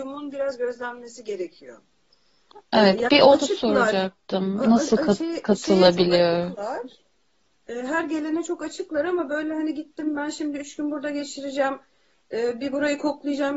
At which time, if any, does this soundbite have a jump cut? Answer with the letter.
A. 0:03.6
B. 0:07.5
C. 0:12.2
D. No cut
D